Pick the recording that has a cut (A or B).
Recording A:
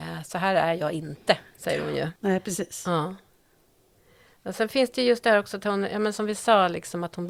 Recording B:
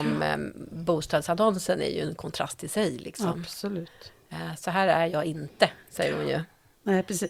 A